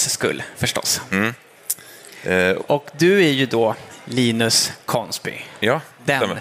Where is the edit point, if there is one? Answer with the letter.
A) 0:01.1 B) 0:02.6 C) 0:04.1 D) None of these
B